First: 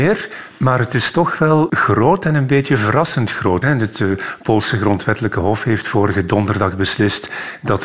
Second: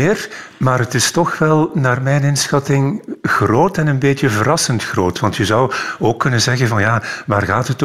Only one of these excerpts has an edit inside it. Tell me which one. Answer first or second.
first